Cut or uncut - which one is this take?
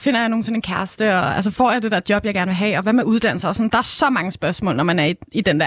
uncut